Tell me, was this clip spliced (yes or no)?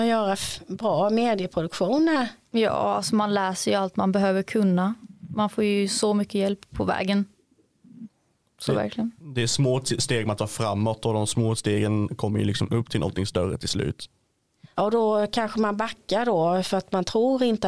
yes